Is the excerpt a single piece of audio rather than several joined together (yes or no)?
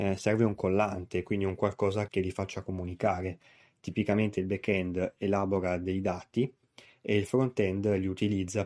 no